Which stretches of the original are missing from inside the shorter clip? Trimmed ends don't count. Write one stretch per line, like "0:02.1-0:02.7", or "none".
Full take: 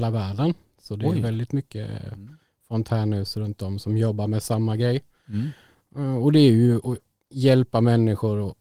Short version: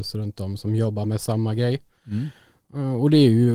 none